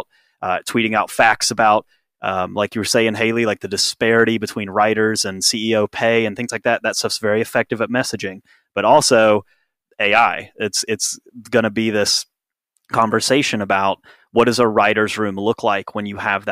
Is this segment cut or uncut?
uncut